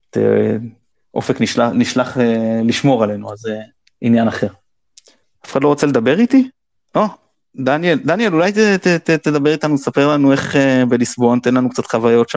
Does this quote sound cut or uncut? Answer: uncut